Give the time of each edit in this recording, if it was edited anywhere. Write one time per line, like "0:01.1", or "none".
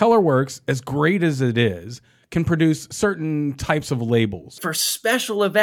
0:04.6

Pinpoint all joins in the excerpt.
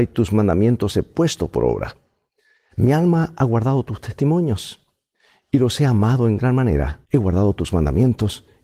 0:07.0

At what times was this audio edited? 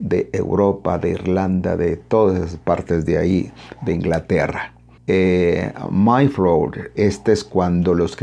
0:05.0
0:07.0

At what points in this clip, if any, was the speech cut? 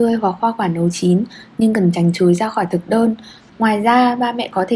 0:03.5

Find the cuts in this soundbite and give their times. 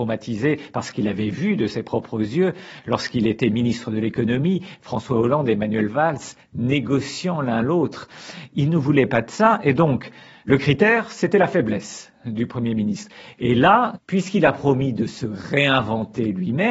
none

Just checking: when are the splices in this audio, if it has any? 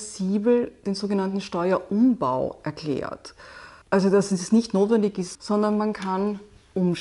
0:03.8
0:05.3

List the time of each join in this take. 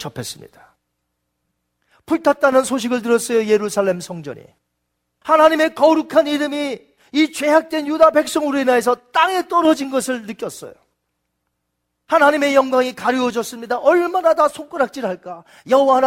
none

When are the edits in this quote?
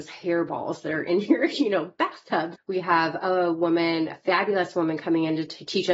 0:02.5

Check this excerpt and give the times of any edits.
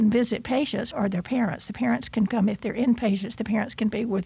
0:00.9

